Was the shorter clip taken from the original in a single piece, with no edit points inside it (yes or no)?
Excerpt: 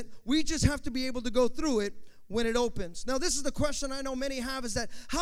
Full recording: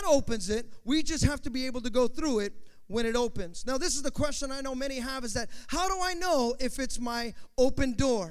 yes